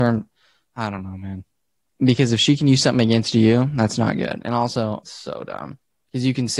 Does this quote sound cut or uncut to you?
cut